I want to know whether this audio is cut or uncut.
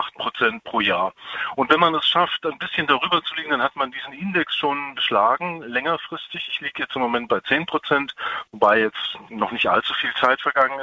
uncut